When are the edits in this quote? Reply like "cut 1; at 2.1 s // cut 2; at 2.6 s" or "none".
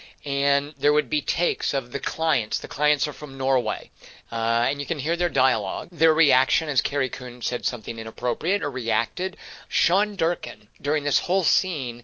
cut 1; at 5.9 s // cut 2; at 8.6 s // cut 3; at 9.7 s